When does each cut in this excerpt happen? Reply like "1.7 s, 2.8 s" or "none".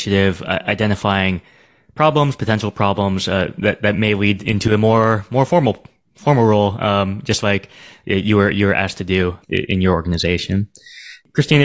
none

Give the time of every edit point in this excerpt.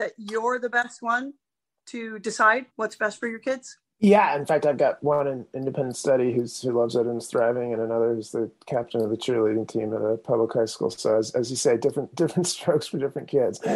2.7 s

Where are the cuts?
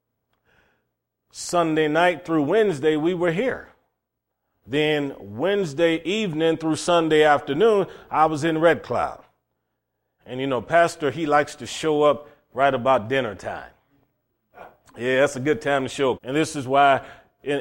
10.2 s, 16.2 s

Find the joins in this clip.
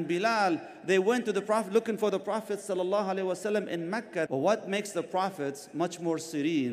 4.3 s

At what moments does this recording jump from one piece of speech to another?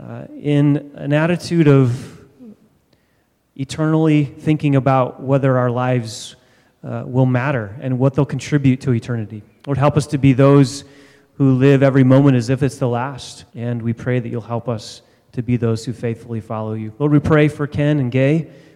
13.5 s

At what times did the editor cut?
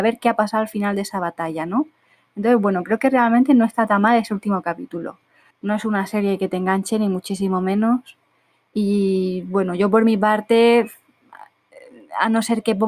5.5 s

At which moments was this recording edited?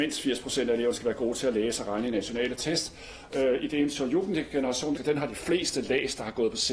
3.3 s, 5.0 s

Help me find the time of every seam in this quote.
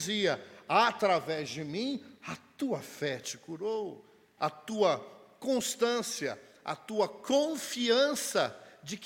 4.4 s

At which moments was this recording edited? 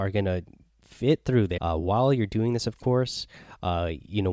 1.6 s

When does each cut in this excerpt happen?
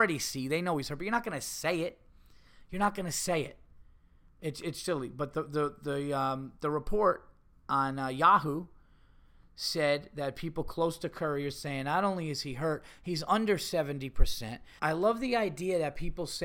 4.8 s, 14.8 s

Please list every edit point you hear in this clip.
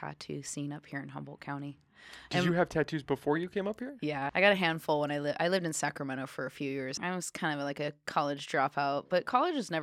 4.3 s, 7.0 s

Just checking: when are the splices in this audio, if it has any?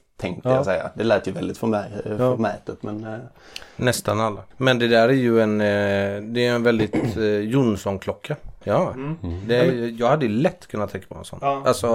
4.5 s, 8.6 s

